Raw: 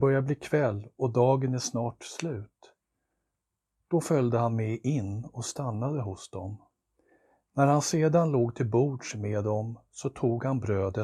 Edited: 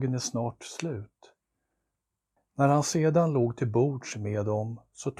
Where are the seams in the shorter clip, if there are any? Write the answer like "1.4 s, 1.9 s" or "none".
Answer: 2.4 s